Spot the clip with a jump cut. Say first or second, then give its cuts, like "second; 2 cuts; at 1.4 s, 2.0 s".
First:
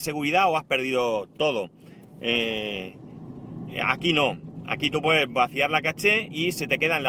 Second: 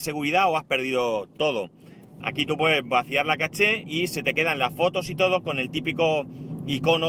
second; 1 cut; at 2.2 s